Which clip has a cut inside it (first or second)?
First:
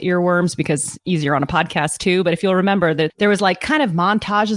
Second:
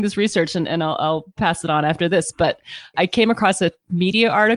first